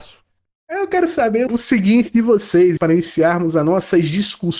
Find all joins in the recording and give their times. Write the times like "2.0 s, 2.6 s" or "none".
1.5 s, 2.8 s